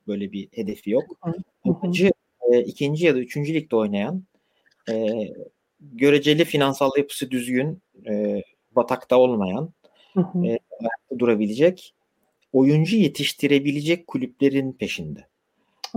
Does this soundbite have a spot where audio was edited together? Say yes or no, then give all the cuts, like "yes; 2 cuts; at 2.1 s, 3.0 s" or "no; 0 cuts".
no; 0 cuts